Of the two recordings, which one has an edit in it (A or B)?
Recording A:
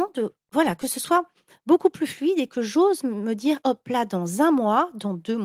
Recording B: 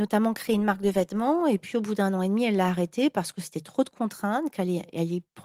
A